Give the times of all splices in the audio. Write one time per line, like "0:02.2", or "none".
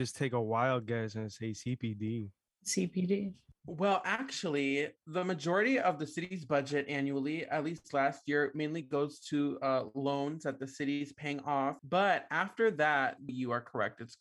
0:11.8
0:13.3